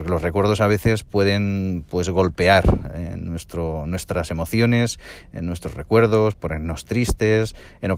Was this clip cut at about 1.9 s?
no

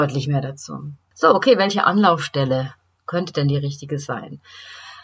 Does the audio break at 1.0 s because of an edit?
no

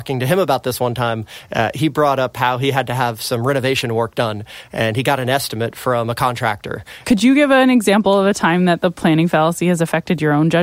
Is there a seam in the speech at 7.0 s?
yes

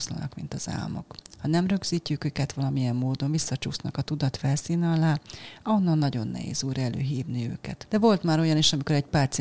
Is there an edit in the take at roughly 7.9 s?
yes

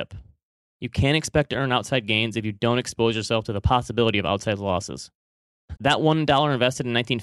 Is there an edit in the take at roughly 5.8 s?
yes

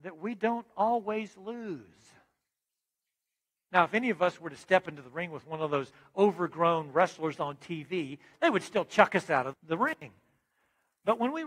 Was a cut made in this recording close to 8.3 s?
yes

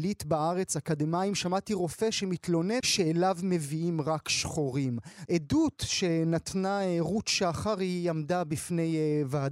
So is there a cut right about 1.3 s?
no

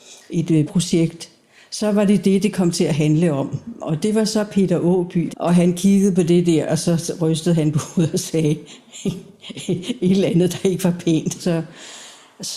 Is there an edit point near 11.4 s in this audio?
yes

